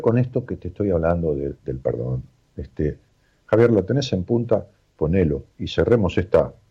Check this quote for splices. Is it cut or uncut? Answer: cut